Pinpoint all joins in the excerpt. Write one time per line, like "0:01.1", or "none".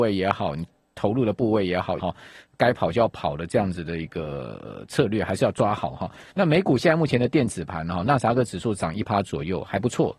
0:02.0
0:06.3